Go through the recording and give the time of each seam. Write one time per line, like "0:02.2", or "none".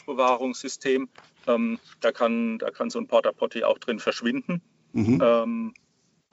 none